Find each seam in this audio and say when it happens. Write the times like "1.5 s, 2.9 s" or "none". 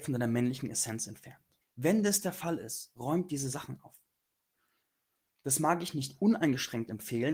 1.6 s

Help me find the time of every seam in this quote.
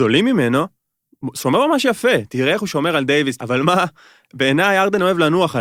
3.4 s

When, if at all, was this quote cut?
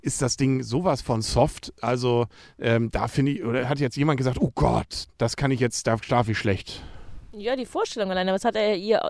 5.1 s

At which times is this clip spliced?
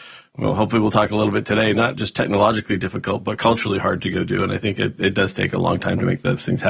none

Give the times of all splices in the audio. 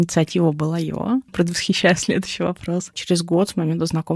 1.3 s, 2.9 s

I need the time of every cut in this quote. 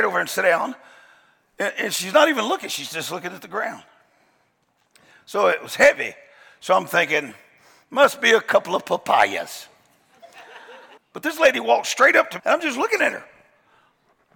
11.0 s, 12.4 s

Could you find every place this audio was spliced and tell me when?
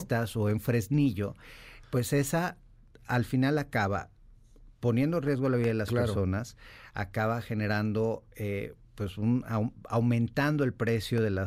1.8 s

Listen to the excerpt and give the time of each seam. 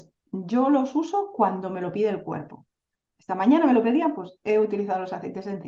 none

